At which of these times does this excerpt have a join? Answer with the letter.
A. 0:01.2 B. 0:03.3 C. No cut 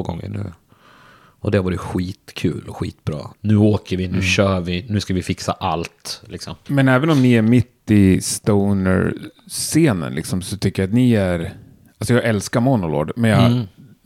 B